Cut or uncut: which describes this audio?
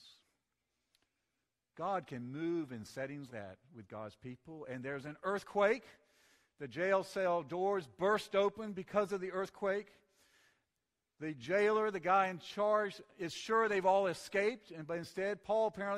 cut